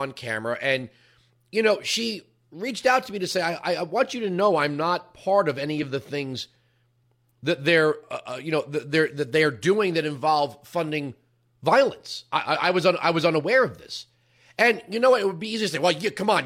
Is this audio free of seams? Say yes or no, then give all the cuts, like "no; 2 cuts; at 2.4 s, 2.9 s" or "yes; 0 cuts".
yes; 0 cuts